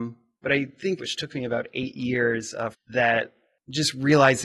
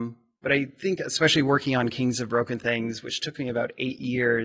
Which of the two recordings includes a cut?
first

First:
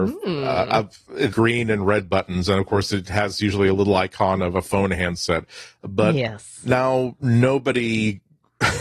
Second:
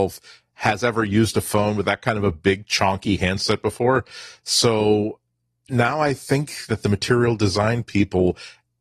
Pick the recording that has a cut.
first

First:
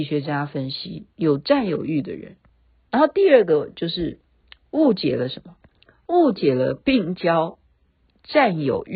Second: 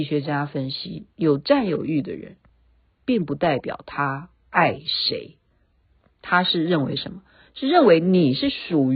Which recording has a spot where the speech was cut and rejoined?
first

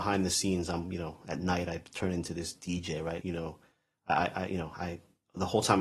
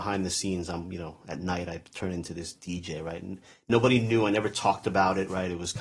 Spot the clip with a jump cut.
first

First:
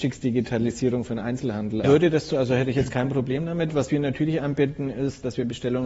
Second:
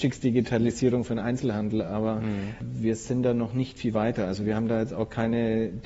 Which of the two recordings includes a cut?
first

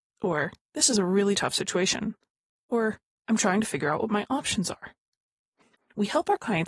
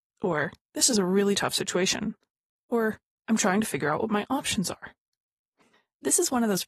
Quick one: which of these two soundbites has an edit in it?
first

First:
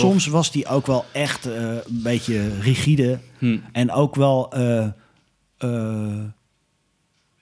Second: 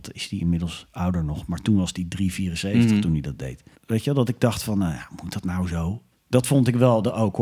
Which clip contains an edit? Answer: second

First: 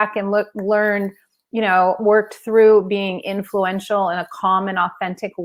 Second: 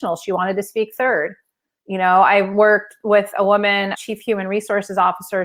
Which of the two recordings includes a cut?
second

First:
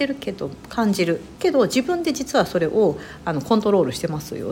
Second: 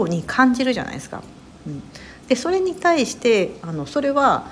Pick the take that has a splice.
first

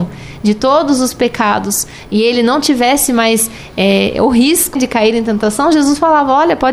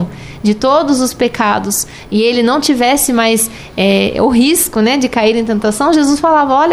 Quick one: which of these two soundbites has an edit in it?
first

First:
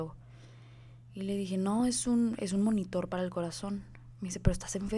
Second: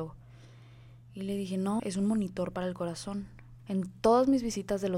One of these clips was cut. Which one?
second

